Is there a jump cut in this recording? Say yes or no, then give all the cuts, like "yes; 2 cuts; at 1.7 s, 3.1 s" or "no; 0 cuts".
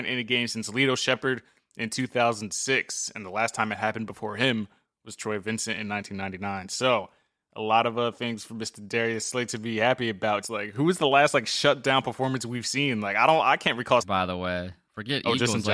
yes; 2 cuts; at 10.4 s, 14.0 s